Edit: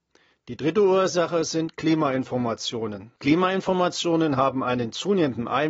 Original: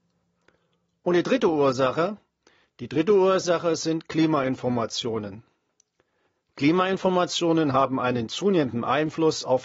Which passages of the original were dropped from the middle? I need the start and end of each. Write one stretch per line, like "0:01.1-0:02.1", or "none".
0:05.5-0:06.5